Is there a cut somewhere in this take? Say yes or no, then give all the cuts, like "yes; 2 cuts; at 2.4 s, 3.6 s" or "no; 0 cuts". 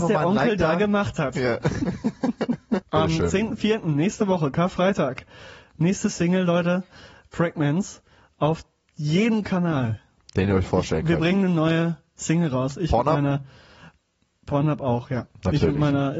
yes; 1 cut; at 2.8 s